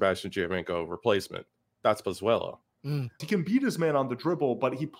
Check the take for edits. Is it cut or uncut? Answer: cut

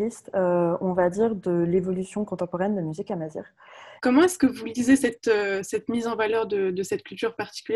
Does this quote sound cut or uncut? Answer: cut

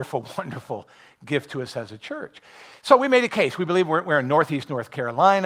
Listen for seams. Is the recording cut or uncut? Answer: uncut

